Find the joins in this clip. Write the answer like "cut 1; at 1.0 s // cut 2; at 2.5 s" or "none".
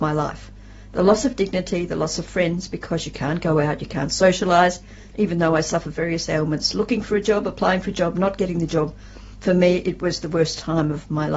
cut 1; at 5.1 s